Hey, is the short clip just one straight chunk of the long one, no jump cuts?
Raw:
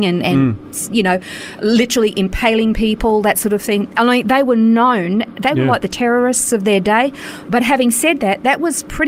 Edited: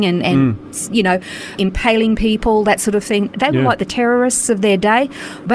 no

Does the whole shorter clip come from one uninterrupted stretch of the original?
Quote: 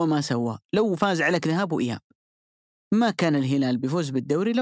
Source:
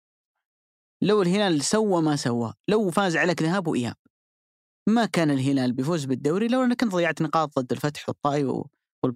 yes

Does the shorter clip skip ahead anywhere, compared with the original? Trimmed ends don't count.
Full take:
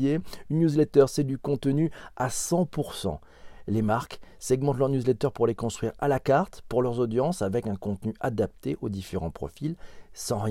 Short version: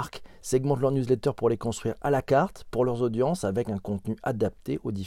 no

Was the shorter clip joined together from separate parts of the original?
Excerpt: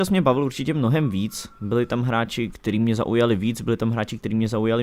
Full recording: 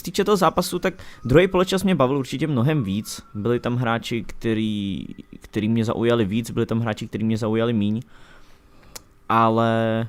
yes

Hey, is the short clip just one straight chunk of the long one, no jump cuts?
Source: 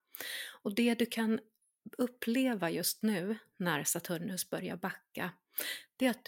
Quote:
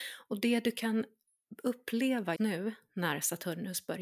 no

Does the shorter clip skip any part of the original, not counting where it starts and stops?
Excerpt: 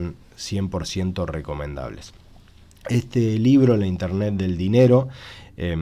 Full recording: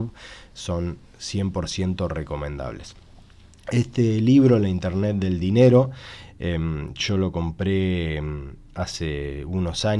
no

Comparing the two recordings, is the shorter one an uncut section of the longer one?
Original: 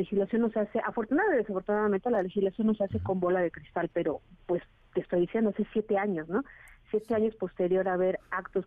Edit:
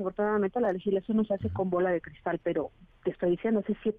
no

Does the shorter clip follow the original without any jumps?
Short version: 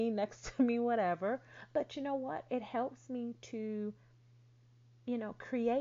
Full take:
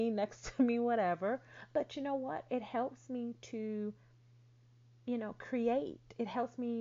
yes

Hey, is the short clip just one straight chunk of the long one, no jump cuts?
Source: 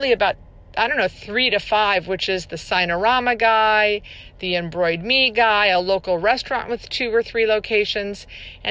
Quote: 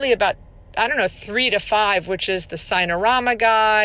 yes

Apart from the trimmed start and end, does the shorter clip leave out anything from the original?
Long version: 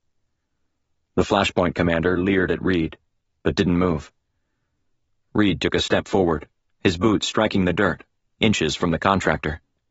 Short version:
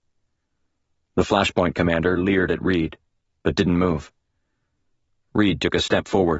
no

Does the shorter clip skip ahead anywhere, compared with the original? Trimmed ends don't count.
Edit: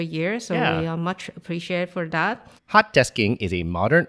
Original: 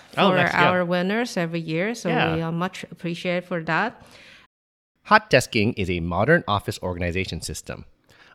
yes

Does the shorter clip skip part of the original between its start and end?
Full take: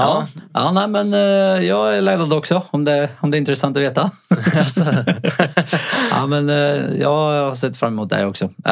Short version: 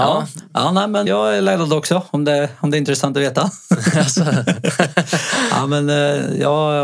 yes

